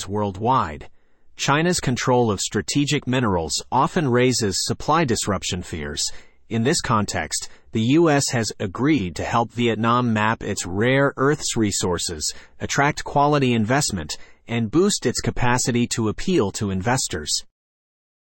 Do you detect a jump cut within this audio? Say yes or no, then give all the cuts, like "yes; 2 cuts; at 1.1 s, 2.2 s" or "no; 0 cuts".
no; 0 cuts